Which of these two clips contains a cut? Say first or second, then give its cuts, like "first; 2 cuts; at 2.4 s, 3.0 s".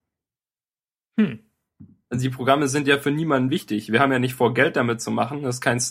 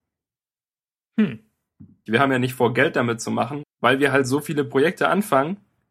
second; 2 cuts; at 2.1 s, 3.6 s